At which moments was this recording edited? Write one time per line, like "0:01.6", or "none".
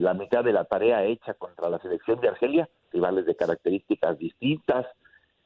0:02.9